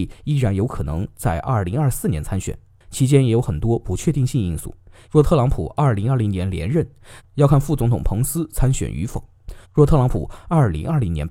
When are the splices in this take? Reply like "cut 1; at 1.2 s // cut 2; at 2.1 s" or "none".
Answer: cut 1; at 5.0 s // cut 2; at 7.2 s // cut 3; at 9.6 s